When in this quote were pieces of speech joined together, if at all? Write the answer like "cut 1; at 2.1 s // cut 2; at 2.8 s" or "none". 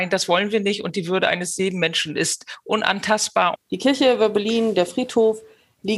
cut 1; at 3.5 s